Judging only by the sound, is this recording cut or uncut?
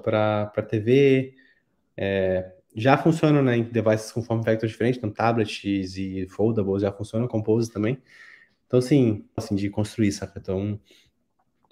cut